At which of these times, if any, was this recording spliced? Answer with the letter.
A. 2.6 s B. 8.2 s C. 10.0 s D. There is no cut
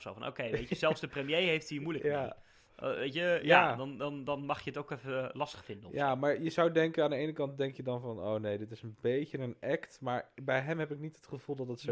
D